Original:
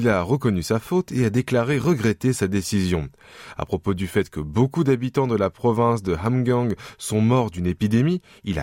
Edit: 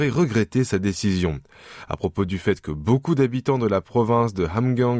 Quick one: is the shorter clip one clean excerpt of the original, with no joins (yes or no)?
yes